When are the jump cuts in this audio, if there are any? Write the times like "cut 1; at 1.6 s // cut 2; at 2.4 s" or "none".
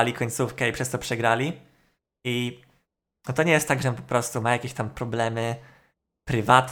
cut 1; at 2.1 s // cut 2; at 3.8 s